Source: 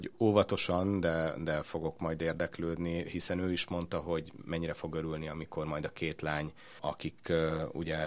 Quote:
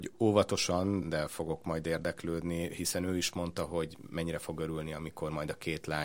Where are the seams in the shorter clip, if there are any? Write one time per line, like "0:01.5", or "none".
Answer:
0:01.0